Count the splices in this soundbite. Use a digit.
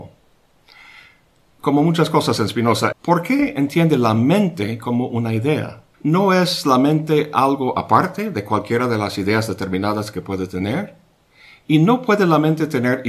2